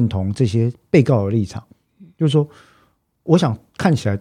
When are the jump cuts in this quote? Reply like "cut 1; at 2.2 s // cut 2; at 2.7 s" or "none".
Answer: cut 1; at 3.3 s

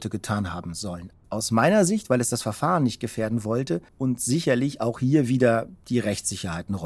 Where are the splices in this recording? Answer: cut 1; at 1.2 s // cut 2; at 3.9 s

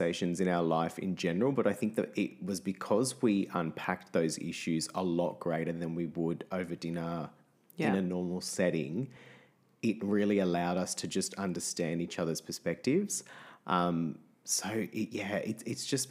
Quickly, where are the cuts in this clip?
none

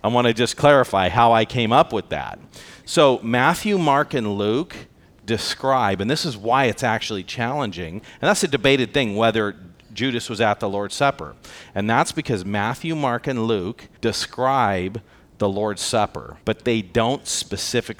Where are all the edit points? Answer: cut 1; at 14.0 s // cut 2; at 16.4 s

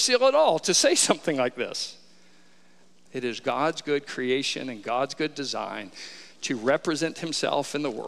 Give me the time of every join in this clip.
cut 1; at 3.1 s

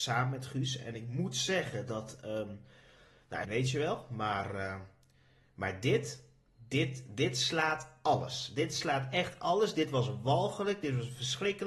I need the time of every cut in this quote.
cut 1; at 3.4 s

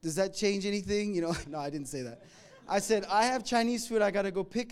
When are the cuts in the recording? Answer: cut 1; at 1.4 s

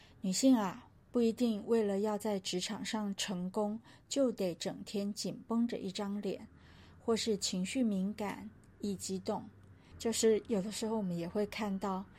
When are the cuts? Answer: cut 1; at 9.9 s

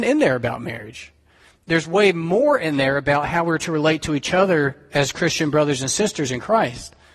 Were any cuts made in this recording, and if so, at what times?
none

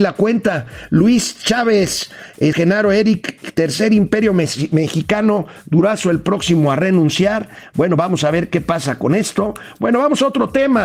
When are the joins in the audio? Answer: cut 1; at 2.5 s

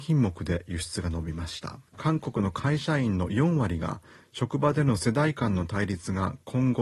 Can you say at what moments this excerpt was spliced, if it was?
cut 1; at 1.9 s

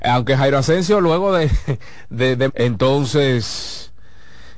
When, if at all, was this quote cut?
cut 1; at 2.5 s

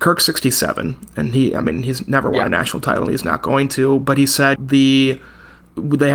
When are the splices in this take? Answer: cut 1; at 4.6 s

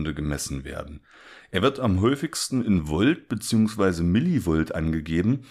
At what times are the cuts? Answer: none

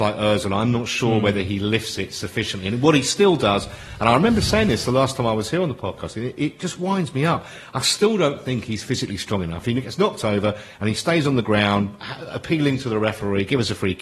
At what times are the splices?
none

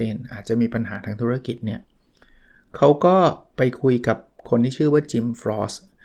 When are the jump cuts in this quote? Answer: none

